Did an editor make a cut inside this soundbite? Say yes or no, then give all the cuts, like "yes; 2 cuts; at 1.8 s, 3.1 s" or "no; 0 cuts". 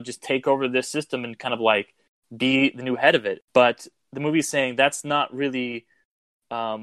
no; 0 cuts